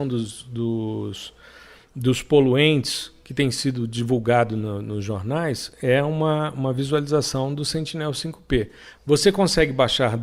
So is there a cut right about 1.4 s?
no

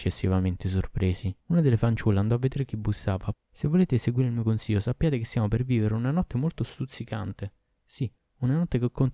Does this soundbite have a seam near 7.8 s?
no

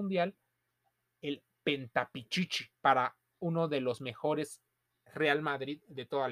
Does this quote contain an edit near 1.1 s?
no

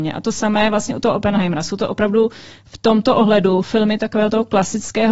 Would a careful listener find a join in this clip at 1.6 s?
no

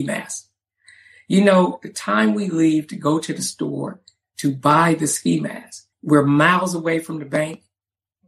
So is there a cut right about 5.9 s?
yes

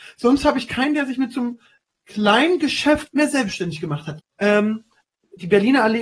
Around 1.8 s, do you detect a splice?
no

